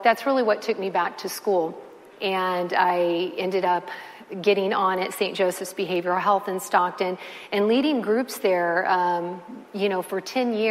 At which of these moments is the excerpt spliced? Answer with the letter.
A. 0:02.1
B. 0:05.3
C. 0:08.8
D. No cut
A